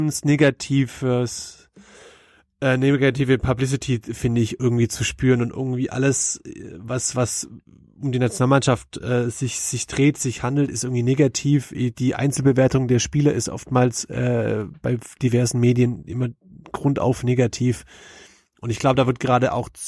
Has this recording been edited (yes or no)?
no